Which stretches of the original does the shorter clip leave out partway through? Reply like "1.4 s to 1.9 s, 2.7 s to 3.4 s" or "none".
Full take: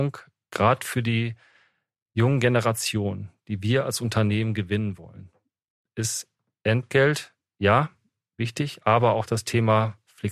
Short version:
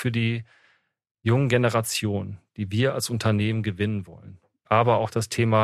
5.6 s to 8.8 s

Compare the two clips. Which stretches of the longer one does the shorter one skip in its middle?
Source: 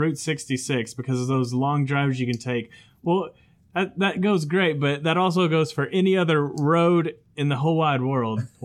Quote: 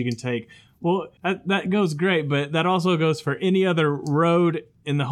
3.4 s to 3.7 s

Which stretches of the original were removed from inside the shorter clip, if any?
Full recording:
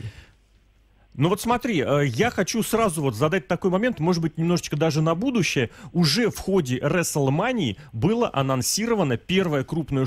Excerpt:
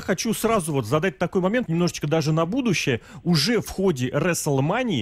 3.9 s to 4.3 s

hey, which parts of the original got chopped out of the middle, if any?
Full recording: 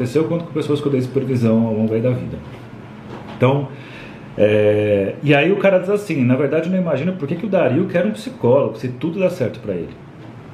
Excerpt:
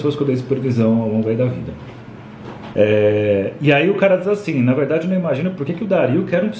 3.4 s to 4.4 s

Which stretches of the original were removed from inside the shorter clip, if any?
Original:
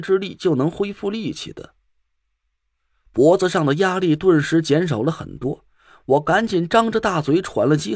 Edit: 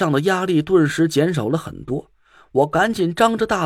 none

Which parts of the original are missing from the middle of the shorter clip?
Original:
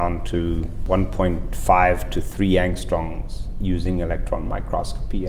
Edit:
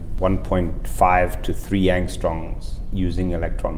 none

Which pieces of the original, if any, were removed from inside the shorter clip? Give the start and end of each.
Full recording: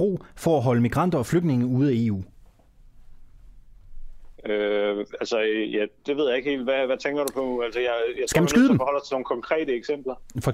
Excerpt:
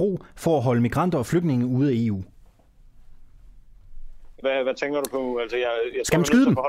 4.4 s to 6.7 s

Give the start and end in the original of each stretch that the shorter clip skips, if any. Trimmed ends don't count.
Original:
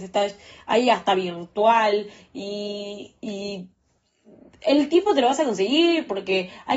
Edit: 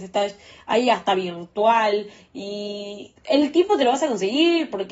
3.2 s to 4.5 s

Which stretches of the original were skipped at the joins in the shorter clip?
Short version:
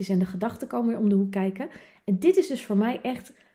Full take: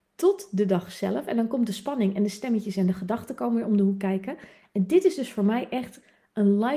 none

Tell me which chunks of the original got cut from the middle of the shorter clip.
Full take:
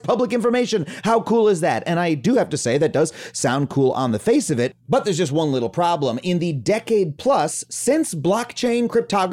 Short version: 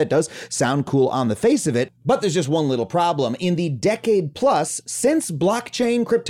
none

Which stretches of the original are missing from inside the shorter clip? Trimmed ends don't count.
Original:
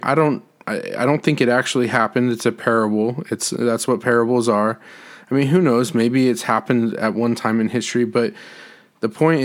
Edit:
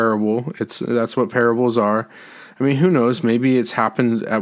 none

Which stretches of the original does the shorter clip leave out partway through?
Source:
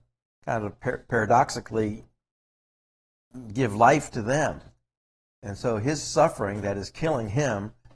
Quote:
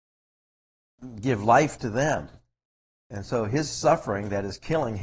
none

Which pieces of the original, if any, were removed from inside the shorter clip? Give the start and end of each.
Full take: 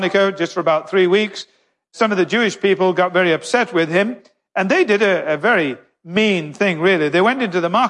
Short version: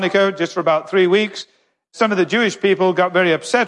none

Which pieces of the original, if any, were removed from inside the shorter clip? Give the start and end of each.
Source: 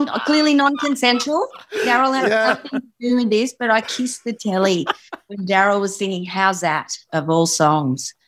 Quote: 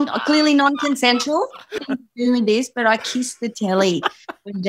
1.8 s to 2.6 s

